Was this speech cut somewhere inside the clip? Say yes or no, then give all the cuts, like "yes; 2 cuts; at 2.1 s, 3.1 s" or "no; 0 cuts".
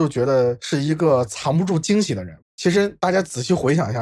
yes; 1 cut; at 2.4 s